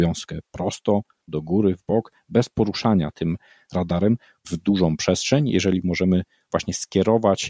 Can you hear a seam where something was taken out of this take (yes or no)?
yes